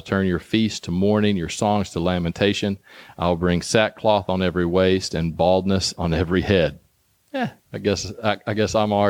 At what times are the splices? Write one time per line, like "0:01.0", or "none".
0:07.6